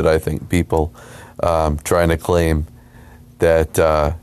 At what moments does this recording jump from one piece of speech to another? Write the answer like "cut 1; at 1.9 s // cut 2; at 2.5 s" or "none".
none